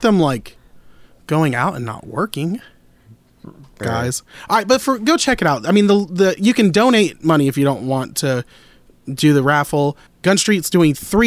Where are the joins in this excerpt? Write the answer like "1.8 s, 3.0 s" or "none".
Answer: 3.8 s, 10.1 s